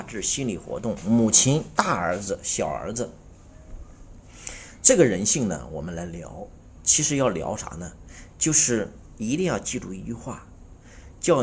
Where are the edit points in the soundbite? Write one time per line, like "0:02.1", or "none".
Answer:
none

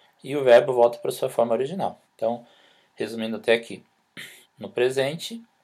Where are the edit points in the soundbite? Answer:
0:02.0
0:04.4

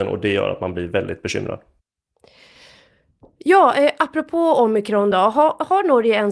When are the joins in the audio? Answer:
none

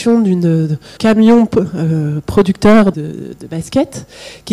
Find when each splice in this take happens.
0:01.0
0:02.9

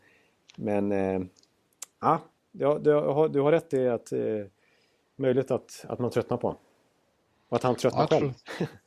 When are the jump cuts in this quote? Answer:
none

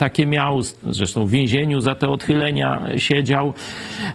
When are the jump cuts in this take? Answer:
none

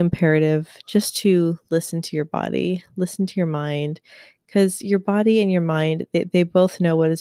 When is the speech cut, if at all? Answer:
none

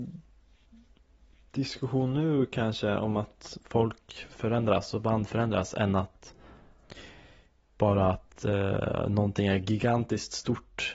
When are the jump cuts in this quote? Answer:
none

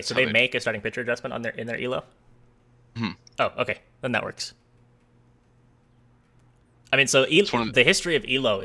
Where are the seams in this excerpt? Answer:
0:07.7

